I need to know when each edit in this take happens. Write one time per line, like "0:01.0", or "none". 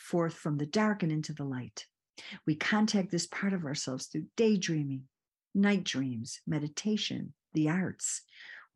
none